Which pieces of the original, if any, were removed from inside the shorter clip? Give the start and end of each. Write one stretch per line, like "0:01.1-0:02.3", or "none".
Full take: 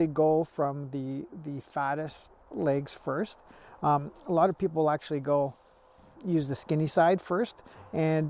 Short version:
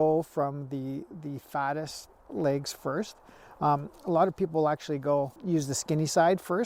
0:05.6-0:06.2